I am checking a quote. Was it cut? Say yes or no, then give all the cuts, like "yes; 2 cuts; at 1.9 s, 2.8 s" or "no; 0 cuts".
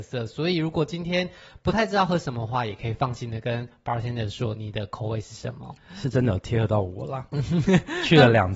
yes; 1 cut; at 5.8 s